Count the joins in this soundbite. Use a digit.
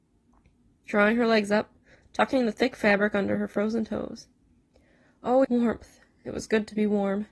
2